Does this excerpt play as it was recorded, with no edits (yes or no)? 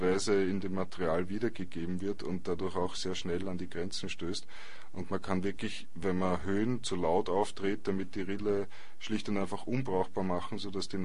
yes